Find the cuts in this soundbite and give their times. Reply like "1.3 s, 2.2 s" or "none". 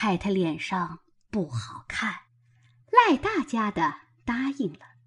2.3 s